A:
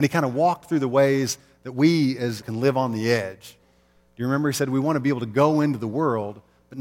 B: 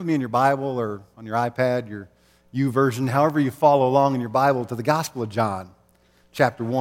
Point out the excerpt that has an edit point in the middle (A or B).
A